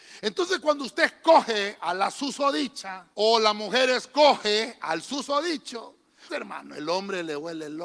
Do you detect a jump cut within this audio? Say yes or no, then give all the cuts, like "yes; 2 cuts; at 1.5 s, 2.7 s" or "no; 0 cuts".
yes; 2 cuts; at 3.1 s, 6.3 s